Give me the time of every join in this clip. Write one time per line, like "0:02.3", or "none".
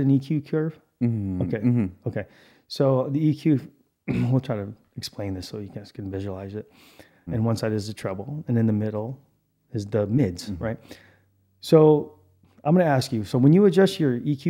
0:07.3